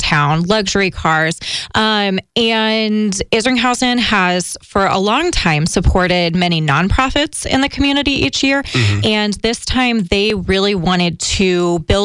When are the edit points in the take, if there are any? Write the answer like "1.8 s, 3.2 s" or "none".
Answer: none